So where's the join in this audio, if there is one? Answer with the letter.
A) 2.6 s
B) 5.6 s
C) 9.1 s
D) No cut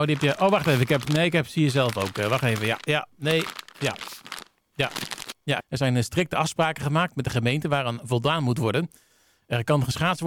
B